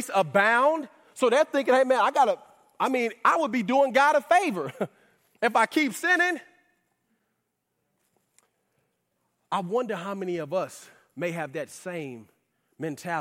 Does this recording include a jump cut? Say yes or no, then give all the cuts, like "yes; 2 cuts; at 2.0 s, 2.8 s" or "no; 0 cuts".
no; 0 cuts